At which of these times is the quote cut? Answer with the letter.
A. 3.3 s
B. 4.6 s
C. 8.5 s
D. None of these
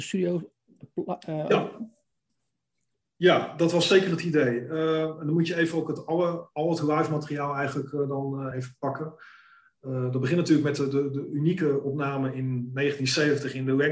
C